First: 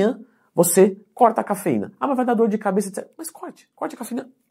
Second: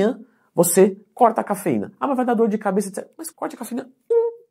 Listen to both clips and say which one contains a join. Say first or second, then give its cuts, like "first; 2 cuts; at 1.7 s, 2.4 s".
second; 1 cut; at 3.3 s